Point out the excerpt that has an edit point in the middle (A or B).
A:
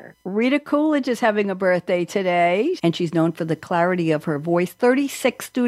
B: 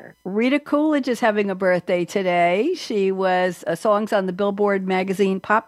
A